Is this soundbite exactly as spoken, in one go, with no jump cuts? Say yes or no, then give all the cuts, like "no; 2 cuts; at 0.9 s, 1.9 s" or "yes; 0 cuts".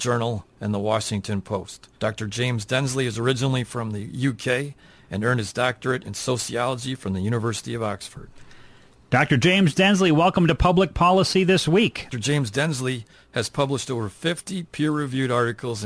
no; 2 cuts; at 1.9 s, 12.1 s